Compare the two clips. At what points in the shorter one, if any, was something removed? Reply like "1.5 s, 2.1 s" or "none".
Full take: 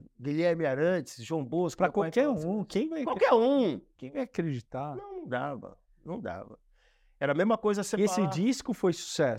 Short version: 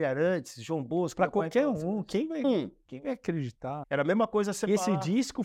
2.4 s, 3.8 s